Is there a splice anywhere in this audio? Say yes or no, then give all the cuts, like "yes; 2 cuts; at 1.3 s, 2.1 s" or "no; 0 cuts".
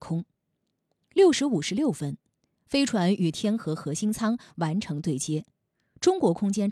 no; 0 cuts